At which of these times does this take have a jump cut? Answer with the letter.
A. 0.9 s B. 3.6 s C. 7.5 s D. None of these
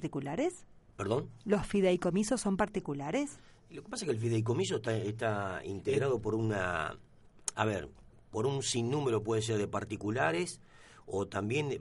D